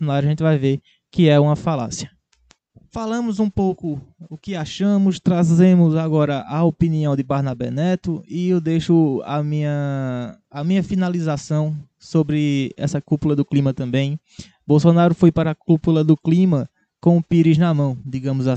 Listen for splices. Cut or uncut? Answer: uncut